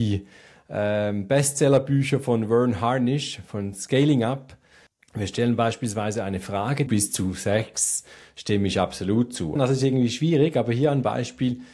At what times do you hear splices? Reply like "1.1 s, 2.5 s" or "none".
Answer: 6.9 s, 9.6 s